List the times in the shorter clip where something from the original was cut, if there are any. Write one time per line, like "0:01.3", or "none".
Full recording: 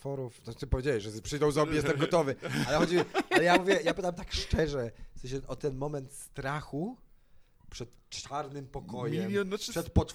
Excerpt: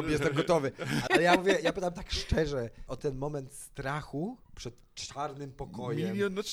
0:01.1
0:02.9
0:04.4

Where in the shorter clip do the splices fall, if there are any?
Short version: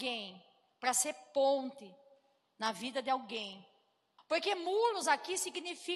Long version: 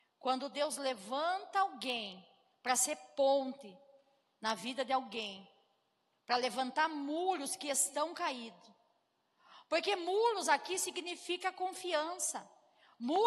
0:04.2

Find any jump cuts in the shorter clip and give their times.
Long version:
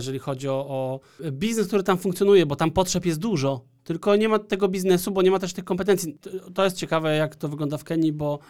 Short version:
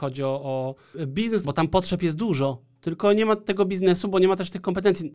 0:01.4

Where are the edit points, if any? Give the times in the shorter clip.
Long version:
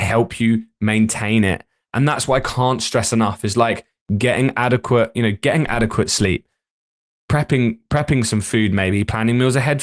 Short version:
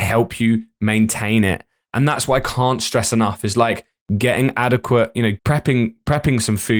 0:05.4

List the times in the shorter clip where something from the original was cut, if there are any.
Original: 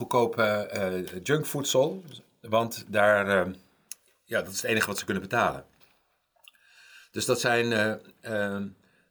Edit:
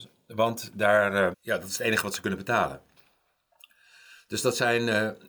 0:01.3

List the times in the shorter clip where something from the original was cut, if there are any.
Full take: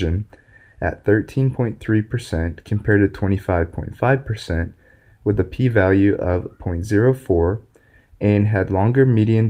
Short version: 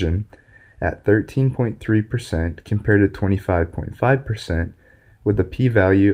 none

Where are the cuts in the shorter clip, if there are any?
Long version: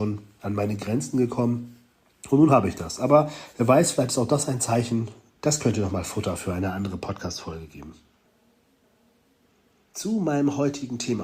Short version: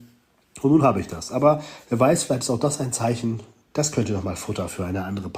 none

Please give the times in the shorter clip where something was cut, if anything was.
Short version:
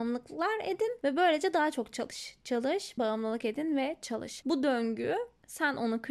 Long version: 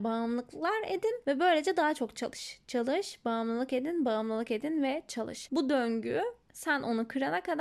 0:03.0

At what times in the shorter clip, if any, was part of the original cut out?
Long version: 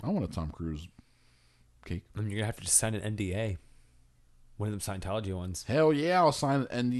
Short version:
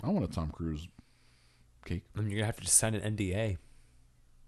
none

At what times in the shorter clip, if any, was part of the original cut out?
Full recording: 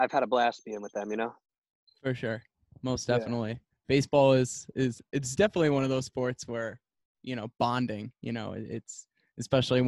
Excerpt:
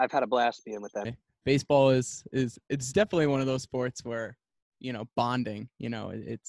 0:01.0

